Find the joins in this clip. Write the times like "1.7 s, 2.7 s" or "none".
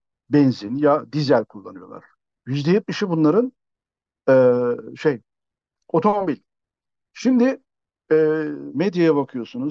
8.7 s